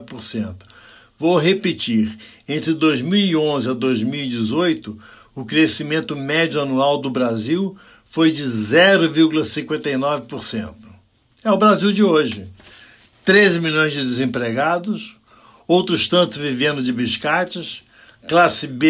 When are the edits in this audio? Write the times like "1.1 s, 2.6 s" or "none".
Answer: none